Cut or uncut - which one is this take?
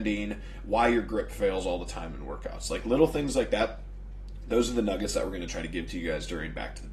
uncut